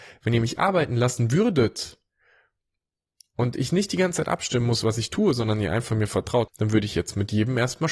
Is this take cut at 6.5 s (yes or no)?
yes